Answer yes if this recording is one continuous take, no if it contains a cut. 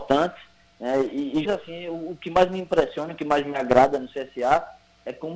no